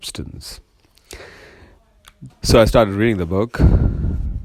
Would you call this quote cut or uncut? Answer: cut